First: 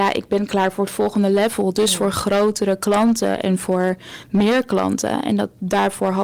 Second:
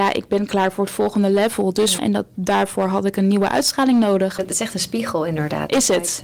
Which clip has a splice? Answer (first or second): second